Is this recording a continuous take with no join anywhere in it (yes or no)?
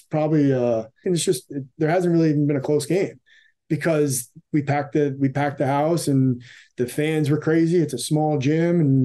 no